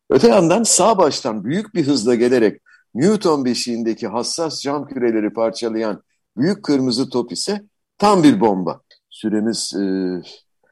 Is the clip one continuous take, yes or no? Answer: no